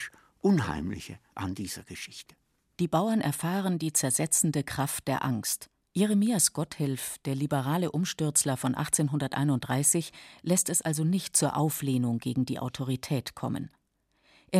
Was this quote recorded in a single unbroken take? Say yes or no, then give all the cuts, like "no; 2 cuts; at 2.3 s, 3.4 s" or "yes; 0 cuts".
no; 2 cuts; at 2.7 s, 5.9 s